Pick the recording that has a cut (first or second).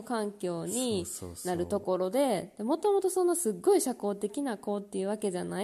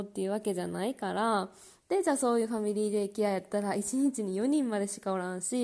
second